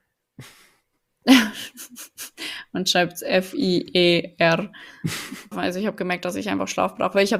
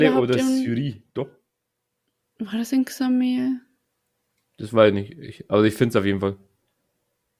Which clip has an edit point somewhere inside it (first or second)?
first